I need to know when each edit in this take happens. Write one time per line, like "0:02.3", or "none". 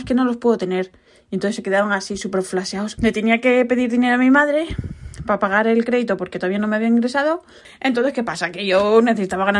0:03.0
0:07.6